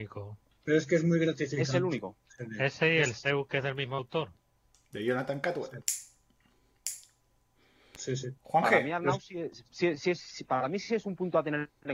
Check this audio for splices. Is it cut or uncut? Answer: cut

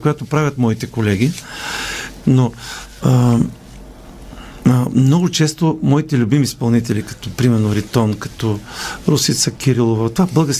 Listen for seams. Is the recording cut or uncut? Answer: cut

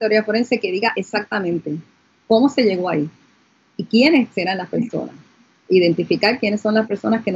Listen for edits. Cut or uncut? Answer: uncut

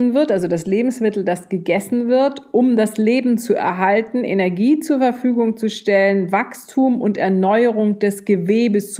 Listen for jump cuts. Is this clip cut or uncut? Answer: uncut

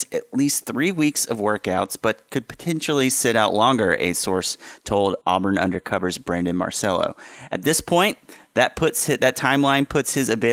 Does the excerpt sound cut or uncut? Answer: uncut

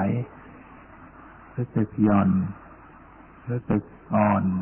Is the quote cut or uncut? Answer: uncut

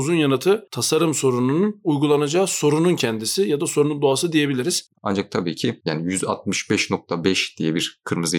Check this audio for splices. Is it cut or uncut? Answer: cut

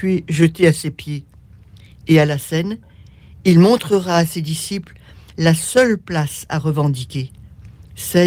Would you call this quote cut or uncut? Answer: uncut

